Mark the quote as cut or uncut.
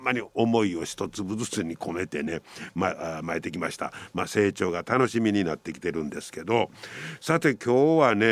uncut